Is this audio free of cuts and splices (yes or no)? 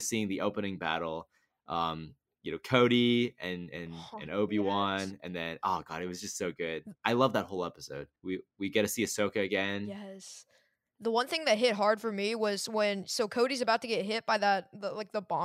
no